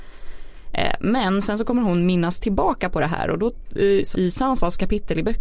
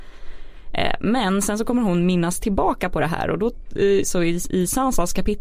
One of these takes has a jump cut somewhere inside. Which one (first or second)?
first